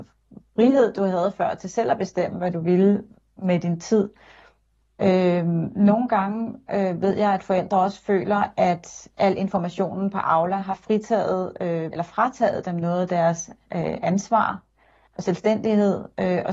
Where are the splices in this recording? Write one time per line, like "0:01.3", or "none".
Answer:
0:11.9